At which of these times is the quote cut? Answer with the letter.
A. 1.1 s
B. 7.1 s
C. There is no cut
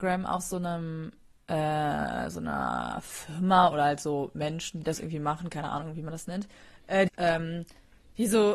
B